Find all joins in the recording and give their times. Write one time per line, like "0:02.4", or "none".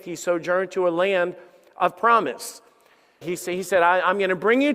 0:03.2